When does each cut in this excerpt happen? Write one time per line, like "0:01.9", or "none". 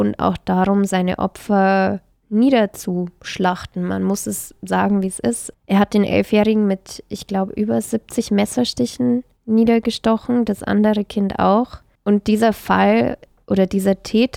none